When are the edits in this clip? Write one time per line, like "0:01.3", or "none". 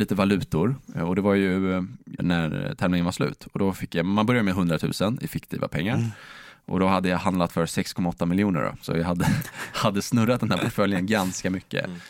0:02.2